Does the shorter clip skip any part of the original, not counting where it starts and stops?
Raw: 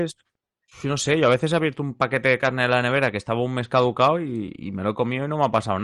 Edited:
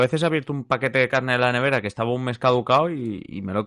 no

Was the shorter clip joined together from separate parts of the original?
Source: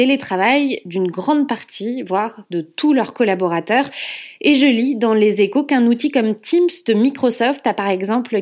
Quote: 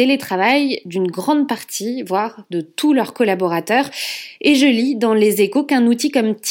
no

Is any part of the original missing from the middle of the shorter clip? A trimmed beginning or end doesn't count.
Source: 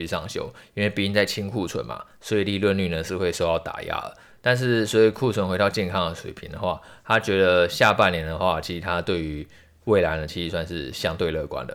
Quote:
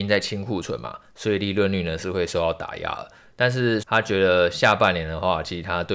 yes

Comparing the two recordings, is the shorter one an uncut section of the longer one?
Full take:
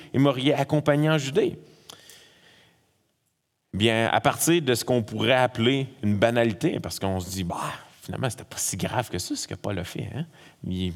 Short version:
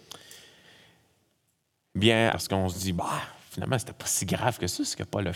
no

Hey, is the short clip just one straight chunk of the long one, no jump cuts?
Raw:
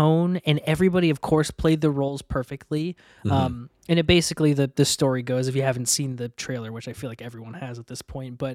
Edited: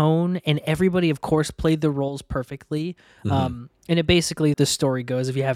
no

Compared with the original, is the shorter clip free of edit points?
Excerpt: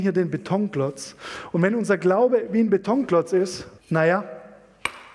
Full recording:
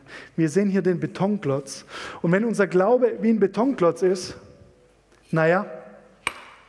no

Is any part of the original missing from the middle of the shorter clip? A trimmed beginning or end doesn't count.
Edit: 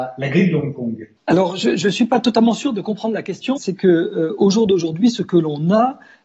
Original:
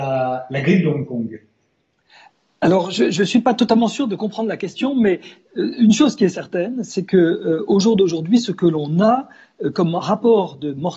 yes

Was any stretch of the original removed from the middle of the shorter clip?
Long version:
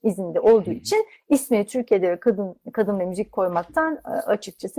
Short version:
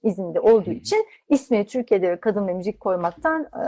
yes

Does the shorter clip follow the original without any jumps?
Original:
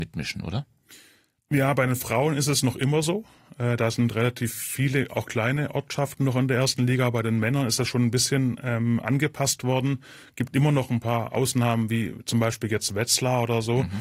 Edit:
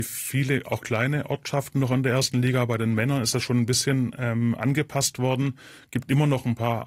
yes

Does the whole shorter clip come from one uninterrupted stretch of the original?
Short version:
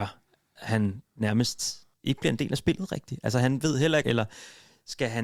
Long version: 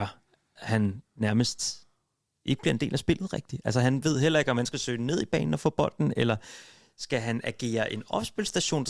no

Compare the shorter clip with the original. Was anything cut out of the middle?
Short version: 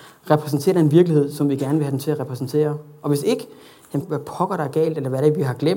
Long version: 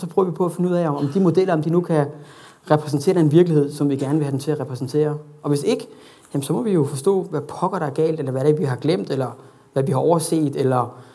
yes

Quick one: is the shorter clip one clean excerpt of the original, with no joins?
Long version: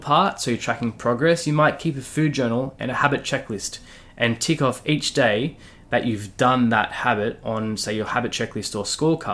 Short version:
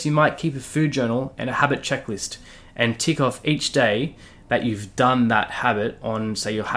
yes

